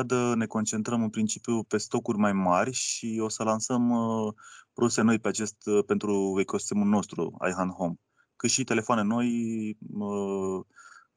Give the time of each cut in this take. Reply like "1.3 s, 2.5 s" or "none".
none